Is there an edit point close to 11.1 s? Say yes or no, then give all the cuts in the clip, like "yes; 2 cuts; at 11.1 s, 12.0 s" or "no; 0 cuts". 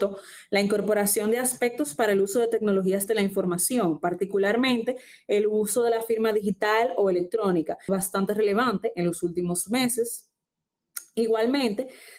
no; 1 cut; at 7.9 s